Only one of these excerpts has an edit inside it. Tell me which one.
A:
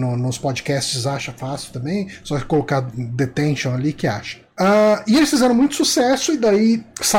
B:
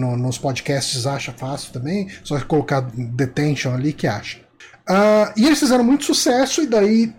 A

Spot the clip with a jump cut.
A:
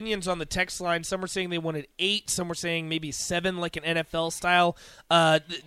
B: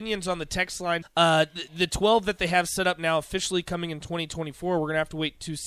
B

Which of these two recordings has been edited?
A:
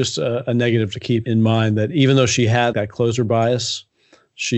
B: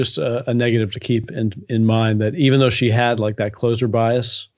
A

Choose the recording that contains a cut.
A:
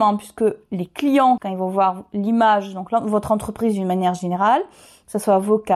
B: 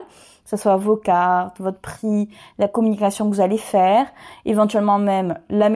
A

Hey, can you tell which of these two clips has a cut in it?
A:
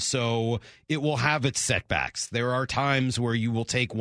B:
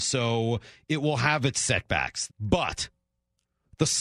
B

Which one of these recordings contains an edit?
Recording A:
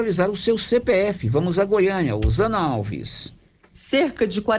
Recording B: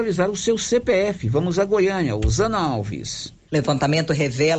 B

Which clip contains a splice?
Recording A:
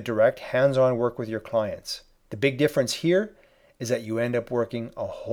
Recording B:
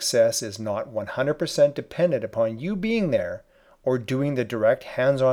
A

